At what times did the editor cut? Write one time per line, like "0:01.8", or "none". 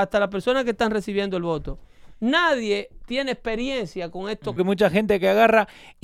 0:04.6